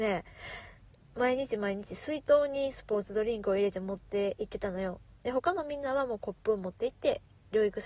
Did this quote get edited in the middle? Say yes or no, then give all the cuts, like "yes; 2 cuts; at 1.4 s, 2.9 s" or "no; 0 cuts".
yes; 1 cut; at 1.0 s